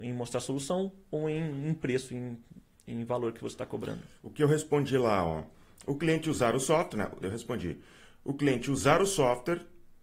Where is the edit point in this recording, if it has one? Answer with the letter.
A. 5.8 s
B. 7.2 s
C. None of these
B